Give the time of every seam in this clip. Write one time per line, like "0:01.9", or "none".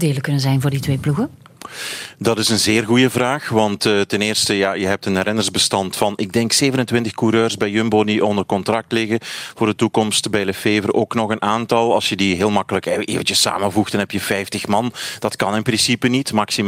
none